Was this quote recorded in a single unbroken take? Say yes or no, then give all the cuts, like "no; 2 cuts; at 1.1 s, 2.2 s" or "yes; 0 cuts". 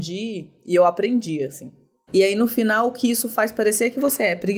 no; 1 cut; at 2.1 s